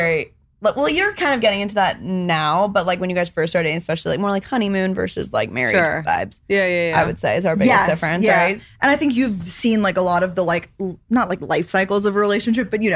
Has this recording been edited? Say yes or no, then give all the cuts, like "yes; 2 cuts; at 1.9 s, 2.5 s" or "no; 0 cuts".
no; 0 cuts